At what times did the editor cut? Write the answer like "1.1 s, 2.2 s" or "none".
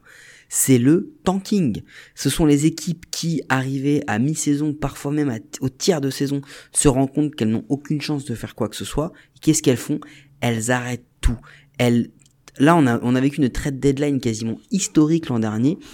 none

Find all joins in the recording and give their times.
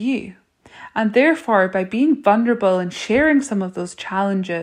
none

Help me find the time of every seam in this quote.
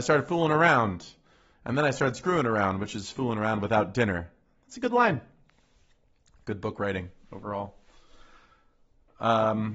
none

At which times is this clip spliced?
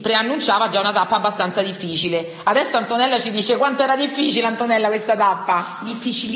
none

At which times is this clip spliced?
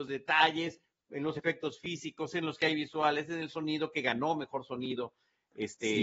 none

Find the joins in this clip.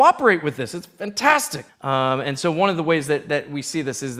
1.7 s

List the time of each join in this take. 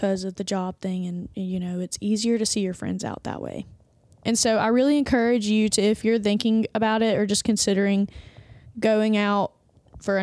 4.2 s

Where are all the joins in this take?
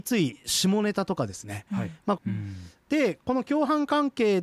2.2 s

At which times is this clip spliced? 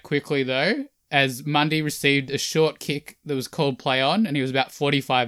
none

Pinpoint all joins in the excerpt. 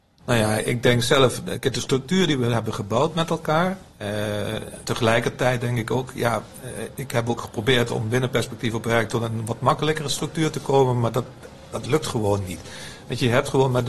4.8 s

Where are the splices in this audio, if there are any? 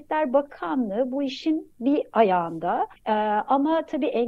3.0 s

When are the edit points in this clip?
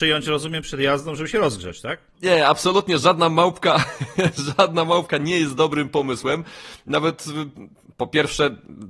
2.1 s

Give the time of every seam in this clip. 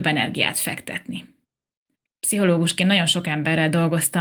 2.0 s

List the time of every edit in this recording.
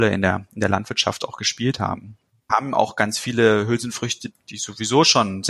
2.5 s, 4.3 s

